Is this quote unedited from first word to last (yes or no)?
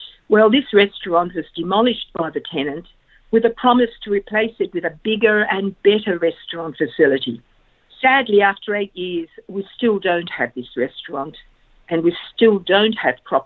yes